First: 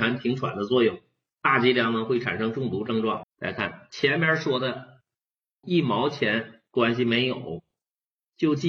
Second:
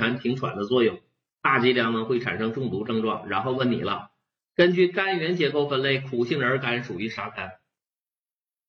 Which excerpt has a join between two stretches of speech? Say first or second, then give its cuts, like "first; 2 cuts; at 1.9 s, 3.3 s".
first; 2 cuts; at 3.2 s, 5.6 s